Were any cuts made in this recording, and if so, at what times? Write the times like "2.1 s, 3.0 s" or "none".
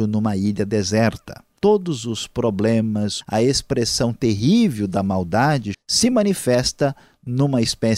1.6 s, 3.2 s, 5.7 s